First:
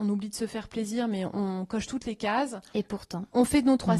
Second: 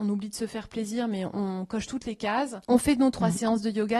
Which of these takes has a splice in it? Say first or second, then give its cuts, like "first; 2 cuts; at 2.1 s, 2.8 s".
second; 1 cut; at 2.6 s